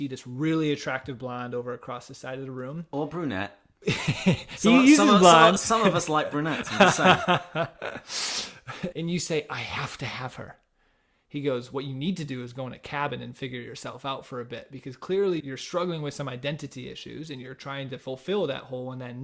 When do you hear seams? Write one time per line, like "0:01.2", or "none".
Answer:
0:08.9
0:15.4